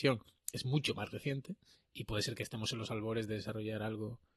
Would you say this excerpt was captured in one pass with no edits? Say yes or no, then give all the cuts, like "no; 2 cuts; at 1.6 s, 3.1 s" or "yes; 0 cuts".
yes; 0 cuts